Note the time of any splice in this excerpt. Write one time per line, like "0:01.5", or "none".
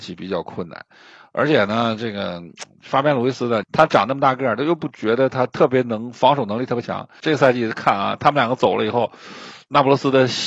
0:03.6
0:07.2